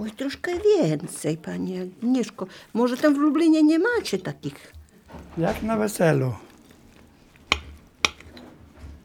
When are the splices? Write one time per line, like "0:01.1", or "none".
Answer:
none